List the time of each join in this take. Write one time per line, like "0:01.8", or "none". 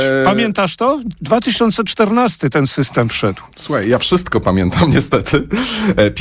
none

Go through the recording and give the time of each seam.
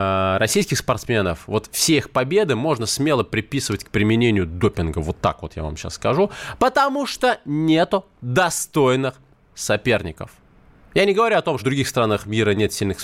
0:11.6

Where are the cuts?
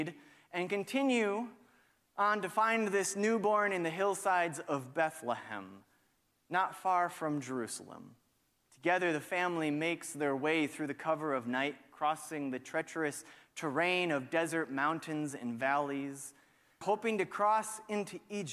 0:08.7
0:16.8

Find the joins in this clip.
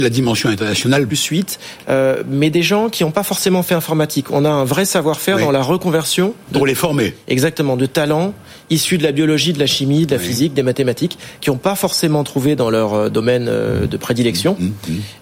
0:01.1

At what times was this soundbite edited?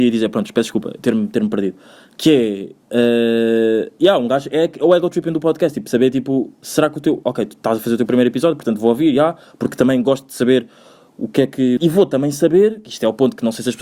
0:11.8

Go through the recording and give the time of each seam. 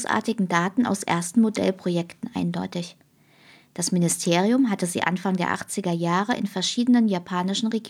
none

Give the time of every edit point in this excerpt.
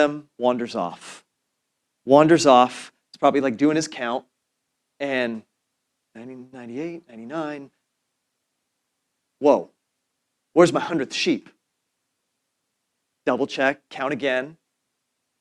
none

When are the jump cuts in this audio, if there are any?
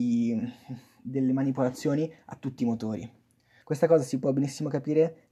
0:03.6

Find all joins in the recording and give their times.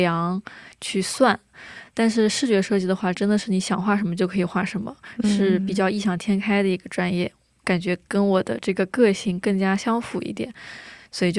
none

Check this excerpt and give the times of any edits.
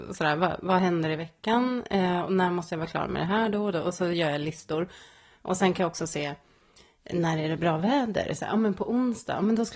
none

